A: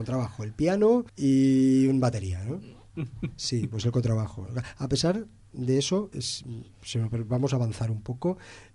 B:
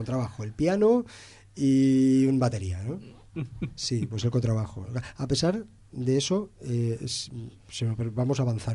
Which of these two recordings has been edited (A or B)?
A